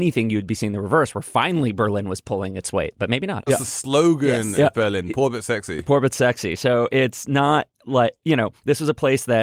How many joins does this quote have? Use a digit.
1